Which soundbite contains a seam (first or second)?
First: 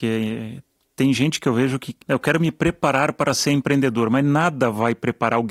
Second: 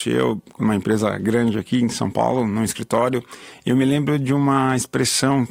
first